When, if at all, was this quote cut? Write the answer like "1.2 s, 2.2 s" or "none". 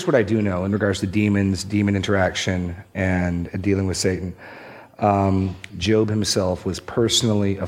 5.7 s